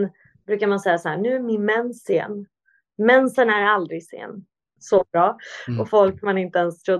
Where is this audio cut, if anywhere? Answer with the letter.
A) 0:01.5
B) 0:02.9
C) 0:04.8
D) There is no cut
C